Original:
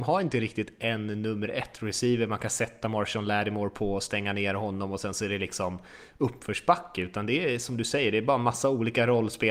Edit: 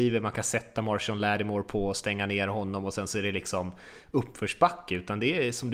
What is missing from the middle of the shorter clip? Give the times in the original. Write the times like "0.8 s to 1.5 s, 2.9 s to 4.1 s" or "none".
none